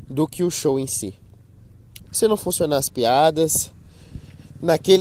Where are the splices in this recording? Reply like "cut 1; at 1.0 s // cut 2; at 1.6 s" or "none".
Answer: cut 1; at 2.1 s